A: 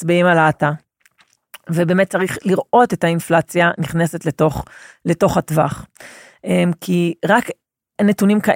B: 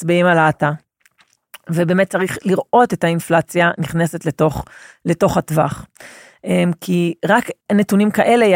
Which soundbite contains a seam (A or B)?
B